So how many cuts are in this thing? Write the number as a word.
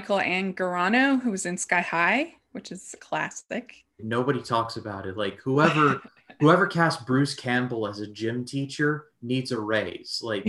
one